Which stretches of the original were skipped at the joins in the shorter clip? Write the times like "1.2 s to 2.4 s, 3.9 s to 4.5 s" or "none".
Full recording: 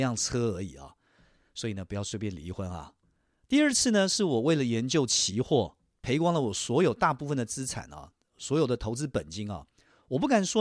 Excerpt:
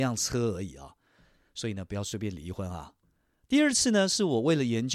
none